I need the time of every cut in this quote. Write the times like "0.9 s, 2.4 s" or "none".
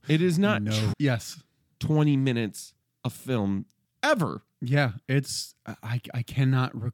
0.9 s

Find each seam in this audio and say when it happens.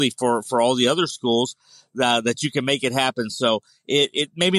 none

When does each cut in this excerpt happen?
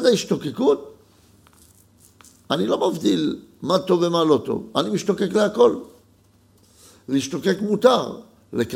none

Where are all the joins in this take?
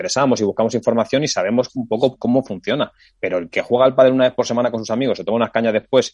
none

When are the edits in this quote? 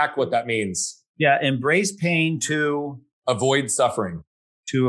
none

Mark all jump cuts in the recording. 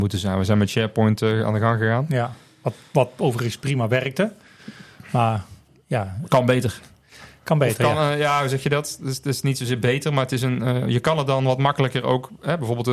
none

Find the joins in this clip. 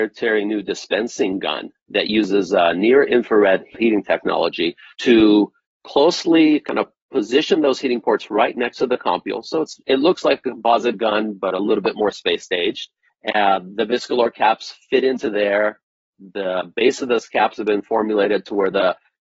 none

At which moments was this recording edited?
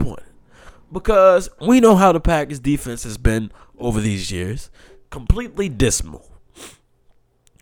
none

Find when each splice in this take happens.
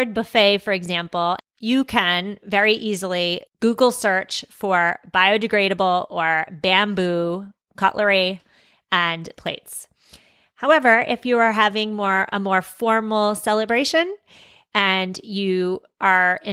1.4 s

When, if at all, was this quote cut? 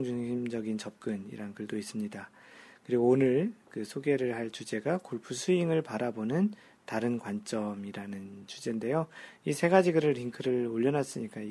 none

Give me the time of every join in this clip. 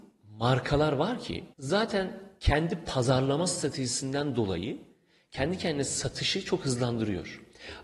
1.5 s

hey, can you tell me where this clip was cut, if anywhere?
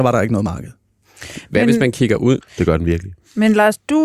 2.4 s

